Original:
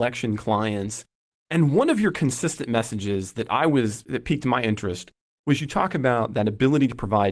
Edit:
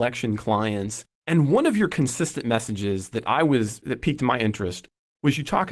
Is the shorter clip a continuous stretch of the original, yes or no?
no